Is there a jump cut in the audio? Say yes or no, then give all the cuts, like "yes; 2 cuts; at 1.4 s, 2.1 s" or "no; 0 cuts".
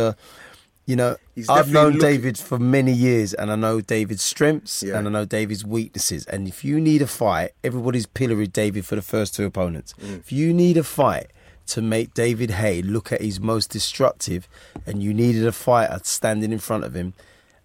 no; 0 cuts